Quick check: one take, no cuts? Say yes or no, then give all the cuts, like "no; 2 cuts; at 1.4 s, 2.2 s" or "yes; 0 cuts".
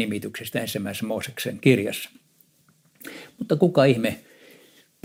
yes; 0 cuts